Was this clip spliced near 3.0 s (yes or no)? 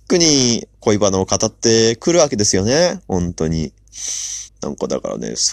no